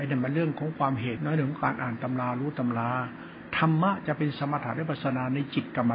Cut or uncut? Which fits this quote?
cut